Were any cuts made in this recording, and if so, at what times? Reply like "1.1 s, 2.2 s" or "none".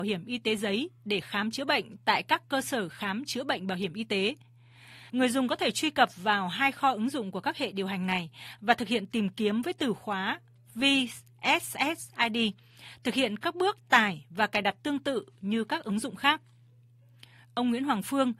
5.1 s